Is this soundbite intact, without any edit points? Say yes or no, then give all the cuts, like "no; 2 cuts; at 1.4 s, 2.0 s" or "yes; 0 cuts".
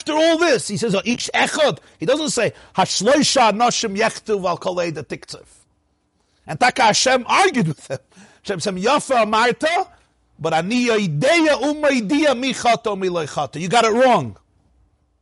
yes; 0 cuts